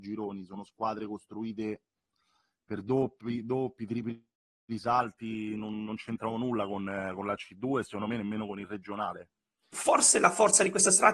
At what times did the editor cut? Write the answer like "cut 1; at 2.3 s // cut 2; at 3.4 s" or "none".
cut 1; at 9.7 s